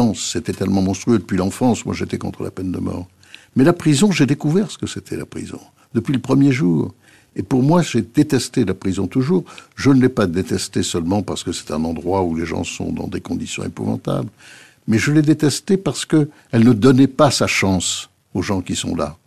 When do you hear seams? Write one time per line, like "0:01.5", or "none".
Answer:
none